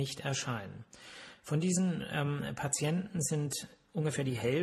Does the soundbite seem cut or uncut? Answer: uncut